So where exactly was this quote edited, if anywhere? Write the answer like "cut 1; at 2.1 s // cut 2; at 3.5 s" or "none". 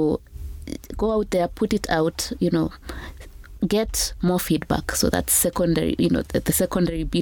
none